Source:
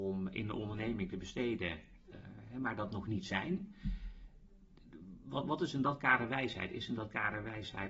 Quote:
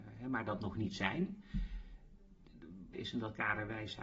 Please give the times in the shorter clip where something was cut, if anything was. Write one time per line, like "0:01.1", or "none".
0:02.9